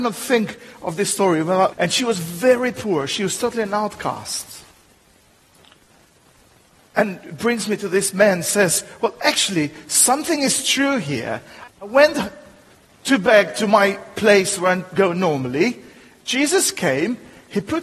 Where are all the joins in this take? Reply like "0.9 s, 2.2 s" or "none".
1.7 s

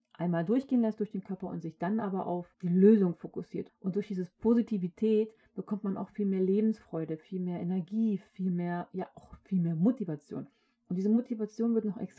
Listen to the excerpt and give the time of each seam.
3.7 s

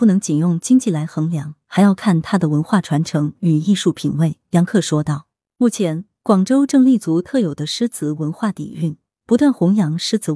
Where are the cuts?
none

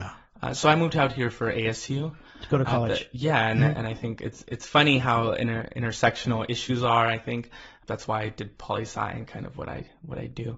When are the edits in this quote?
none

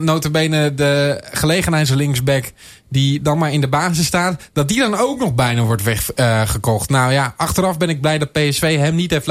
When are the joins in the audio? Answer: none

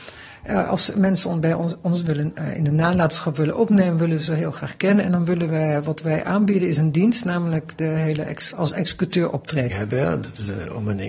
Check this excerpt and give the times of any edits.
8.5 s, 9.7 s

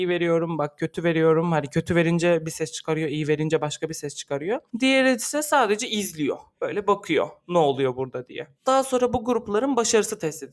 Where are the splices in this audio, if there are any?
none

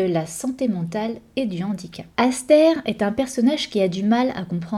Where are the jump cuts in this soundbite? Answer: 2.1 s

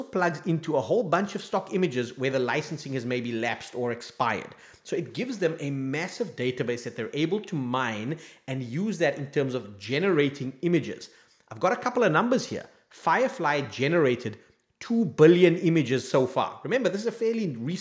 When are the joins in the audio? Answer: none

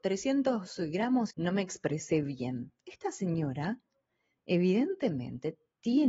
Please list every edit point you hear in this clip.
1.3 s

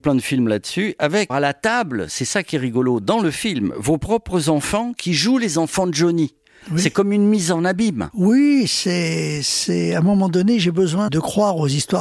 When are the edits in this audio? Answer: 1.3 s, 11.1 s

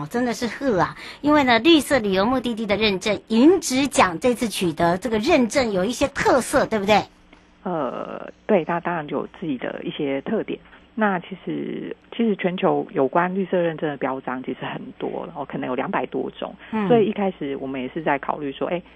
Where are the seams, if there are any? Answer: 10.7 s

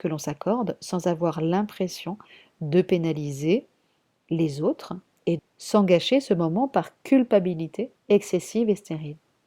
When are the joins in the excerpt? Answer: 5.4 s, 8.0 s

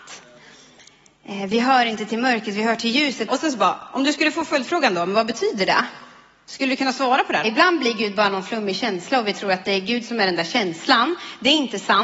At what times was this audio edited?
3.3 s, 7.4 s

